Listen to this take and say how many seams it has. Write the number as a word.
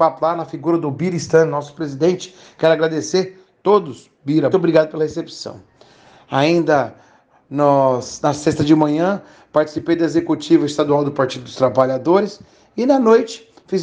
one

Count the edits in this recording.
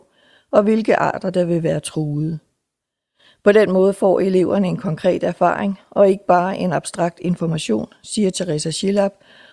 zero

